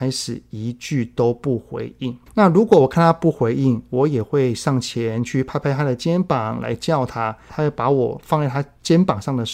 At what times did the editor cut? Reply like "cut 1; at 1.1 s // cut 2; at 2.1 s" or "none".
cut 1; at 2.3 s // cut 2; at 7.5 s